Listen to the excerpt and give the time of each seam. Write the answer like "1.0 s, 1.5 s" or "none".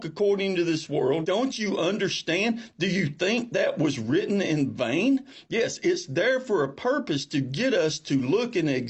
1.2 s

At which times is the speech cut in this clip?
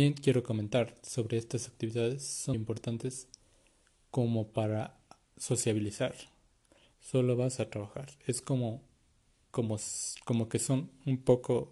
2.5 s, 6.9 s

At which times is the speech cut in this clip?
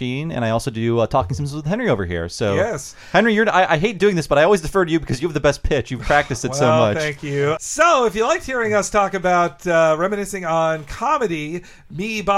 7.6 s

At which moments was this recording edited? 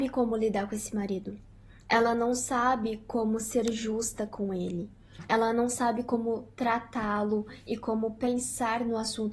none

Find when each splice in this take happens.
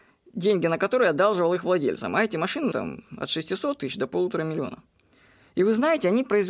2.7 s

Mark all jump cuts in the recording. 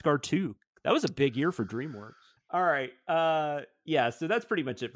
2.4 s

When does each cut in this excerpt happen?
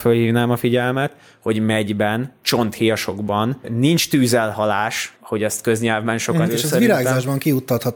5.1 s, 6.5 s

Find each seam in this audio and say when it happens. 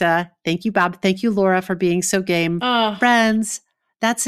none

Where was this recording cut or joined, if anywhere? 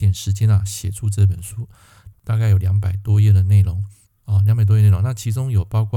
2.1 s

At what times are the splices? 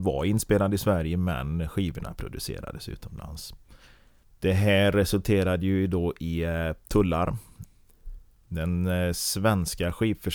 none

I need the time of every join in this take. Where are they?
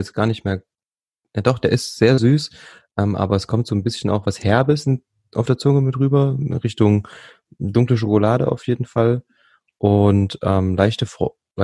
none

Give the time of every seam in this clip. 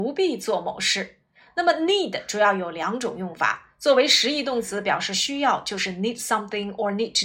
none

